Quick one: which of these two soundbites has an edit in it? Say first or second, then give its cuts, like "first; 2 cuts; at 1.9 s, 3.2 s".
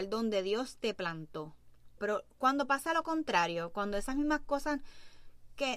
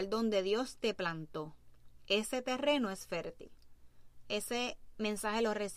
first; 1 cut; at 2.0 s